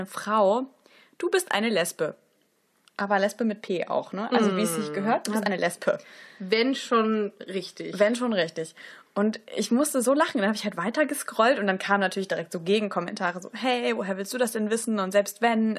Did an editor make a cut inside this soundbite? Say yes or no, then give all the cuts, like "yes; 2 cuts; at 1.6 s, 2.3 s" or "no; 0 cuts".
no; 0 cuts